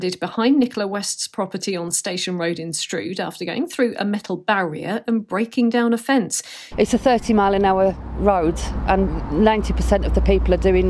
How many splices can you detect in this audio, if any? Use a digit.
1